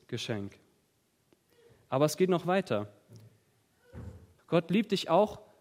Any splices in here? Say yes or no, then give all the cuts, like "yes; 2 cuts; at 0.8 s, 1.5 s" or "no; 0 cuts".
yes; 1 cut; at 4.4 s